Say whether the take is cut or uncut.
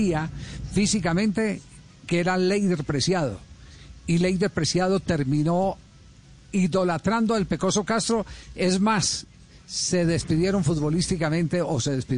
uncut